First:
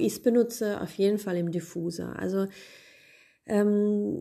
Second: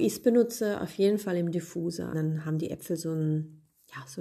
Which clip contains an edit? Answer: second; 1 cut; at 2.1 s

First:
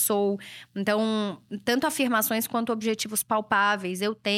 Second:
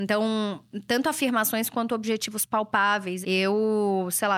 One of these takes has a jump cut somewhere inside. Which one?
second; 1 cut; at 3.2 s

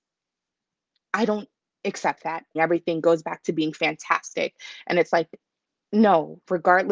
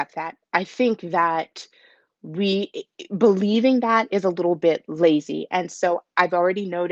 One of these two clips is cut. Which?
first; 1 cut; at 2.6 s

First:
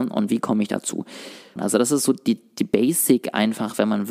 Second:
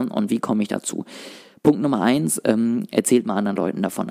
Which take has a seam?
first; 1 cut; at 1.6 s

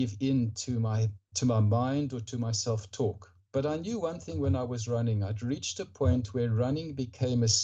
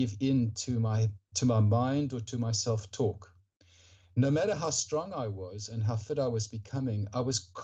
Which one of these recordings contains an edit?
first; 1 cut; at 3.5 s

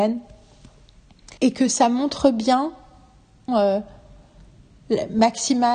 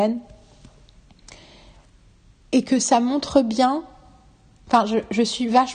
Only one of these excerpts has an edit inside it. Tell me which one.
first; 2 cuts; at 1.4 s, 3.5 s

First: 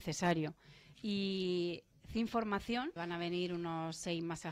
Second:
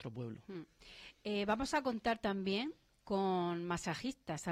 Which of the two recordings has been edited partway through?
first; 2 cuts; at 0.9 s, 3.0 s

